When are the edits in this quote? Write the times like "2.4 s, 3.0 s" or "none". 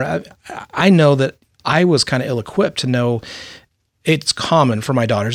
1.5 s